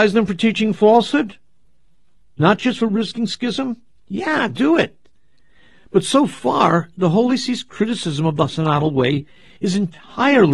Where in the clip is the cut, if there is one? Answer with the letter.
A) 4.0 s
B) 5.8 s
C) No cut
C